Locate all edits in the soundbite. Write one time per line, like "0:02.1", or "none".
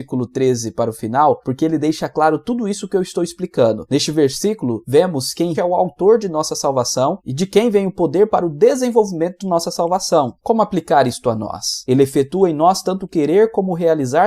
0:05.5
0:10.4
0:11.9